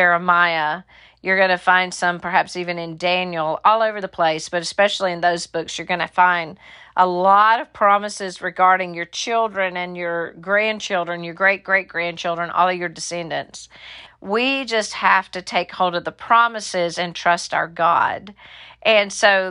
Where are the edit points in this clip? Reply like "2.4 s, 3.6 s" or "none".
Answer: 14.1 s